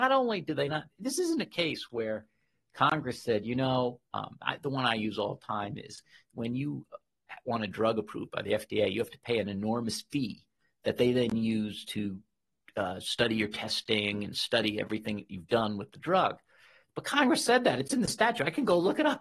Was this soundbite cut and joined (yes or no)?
no